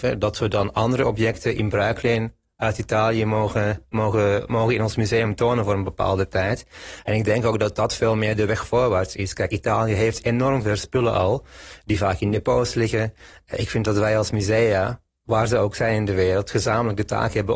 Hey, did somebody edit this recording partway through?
no; 0 cuts

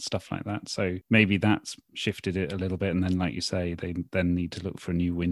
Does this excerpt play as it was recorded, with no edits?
yes; 0 cuts

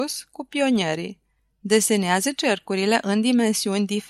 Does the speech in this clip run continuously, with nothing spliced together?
yes; 0 cuts

